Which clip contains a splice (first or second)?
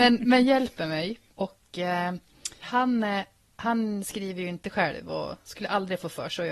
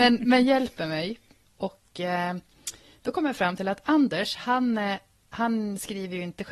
first